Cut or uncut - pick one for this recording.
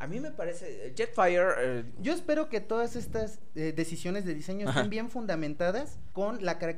uncut